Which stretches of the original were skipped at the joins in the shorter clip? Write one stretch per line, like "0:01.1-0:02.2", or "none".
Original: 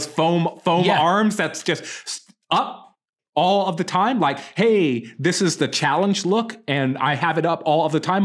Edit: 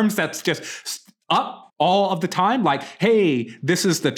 0:02.9-0:03.3